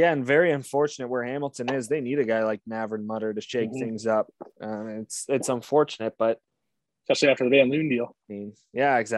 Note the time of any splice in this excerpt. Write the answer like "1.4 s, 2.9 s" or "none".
none